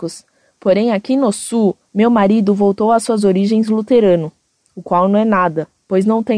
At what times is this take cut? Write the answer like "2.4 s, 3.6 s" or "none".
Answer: 1.9 s

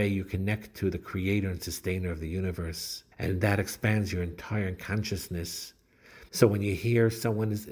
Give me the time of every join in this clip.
3.1 s, 6.3 s

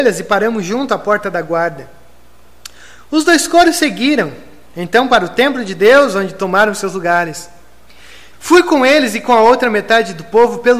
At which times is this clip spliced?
8.3 s

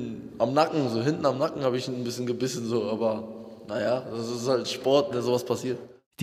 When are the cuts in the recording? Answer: none

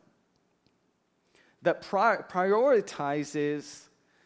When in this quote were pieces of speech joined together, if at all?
none

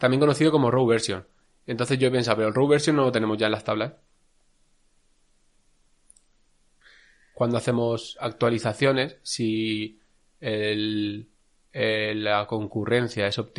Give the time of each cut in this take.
none

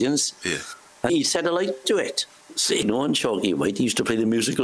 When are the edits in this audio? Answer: 1.1 s, 2.8 s

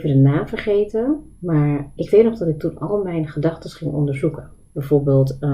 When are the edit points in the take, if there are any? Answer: 2.0 s

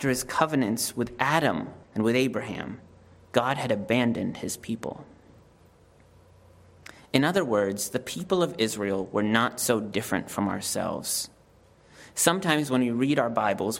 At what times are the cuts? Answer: 1.8 s

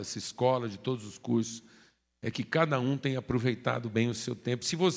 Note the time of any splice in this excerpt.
none

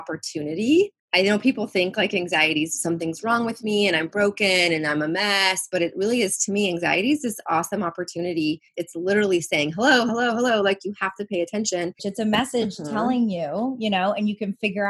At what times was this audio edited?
8.7 s, 10.1 s, 12.0 s

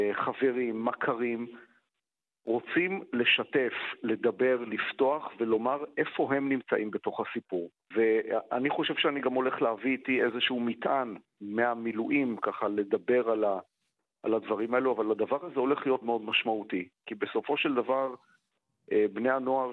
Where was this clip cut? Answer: 7.9 s, 16.0 s

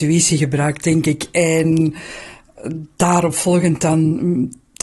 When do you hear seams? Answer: none

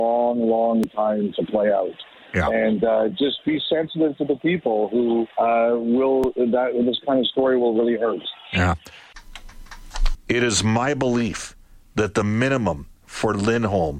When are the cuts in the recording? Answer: 5.3 s, 10.1 s

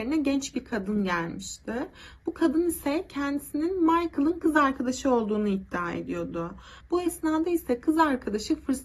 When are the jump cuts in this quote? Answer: 6.8 s

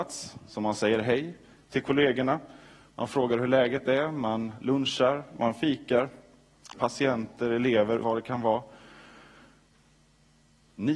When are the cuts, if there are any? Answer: 6.7 s, 8.0 s

